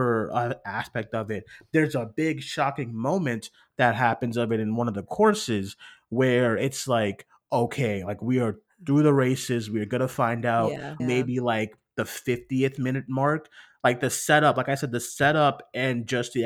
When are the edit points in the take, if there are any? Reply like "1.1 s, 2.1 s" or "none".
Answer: 11.0 s